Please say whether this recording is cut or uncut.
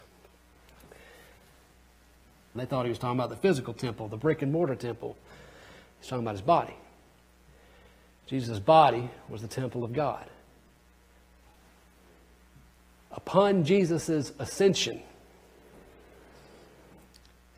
cut